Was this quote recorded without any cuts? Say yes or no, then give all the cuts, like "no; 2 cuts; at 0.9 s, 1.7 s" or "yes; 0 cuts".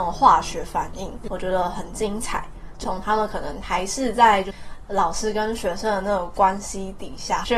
yes; 0 cuts